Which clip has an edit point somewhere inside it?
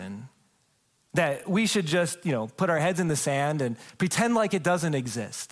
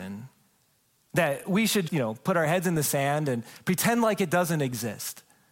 second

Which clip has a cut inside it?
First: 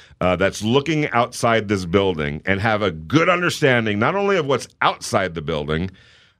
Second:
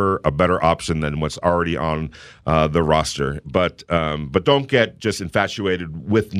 second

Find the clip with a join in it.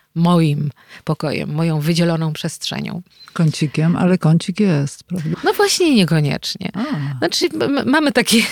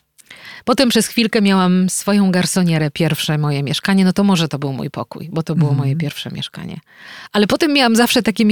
first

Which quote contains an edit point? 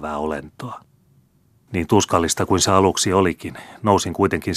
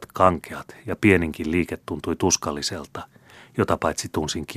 first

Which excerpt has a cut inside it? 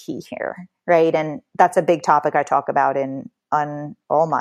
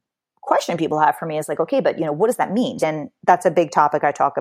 second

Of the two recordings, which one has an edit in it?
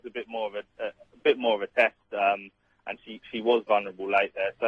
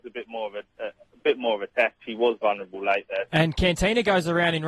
second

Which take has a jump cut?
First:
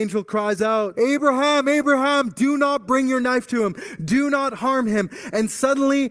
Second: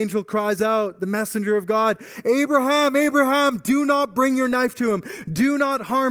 first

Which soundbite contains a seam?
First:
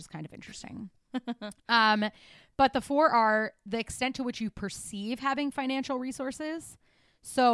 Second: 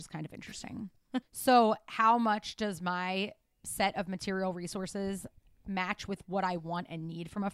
second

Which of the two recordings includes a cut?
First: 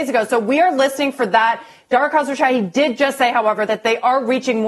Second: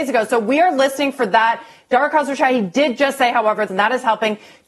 second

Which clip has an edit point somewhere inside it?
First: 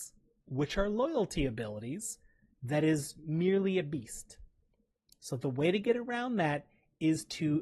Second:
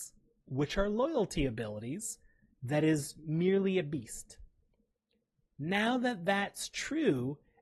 first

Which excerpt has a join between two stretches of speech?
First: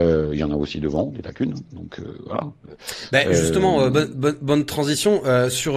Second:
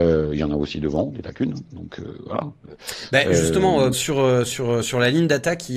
second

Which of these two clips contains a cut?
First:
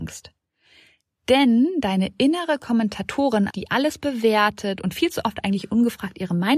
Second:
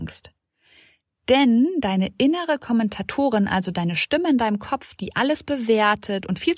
first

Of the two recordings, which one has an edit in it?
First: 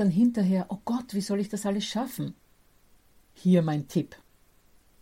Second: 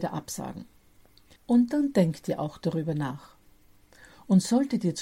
second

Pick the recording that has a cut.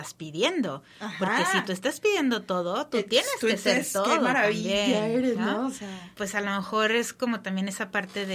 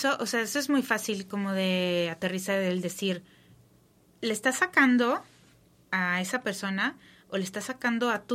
first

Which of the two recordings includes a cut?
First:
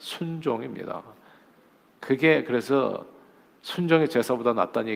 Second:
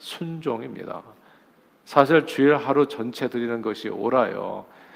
second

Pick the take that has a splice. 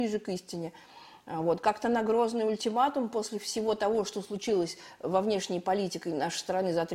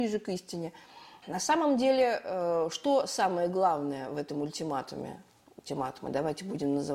second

